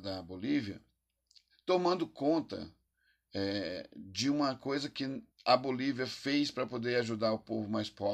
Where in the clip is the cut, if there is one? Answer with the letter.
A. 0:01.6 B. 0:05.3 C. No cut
B